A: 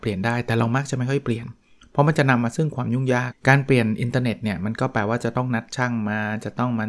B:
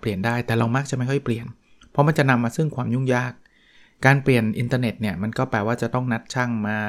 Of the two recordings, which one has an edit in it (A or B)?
A